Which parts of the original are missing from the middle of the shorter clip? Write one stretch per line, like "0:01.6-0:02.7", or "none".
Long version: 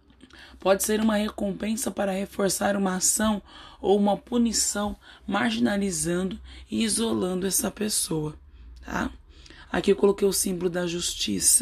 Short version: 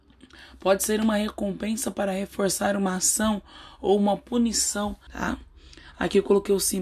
0:05.1-0:08.8